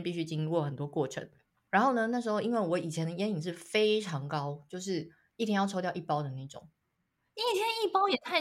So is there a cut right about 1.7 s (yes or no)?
yes